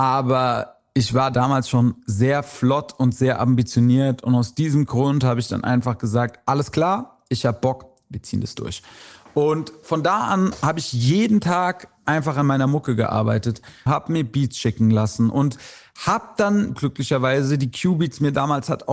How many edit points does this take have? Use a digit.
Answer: 2